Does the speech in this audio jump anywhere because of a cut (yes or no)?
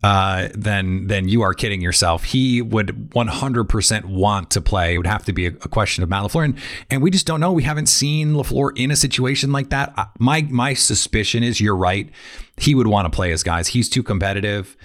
no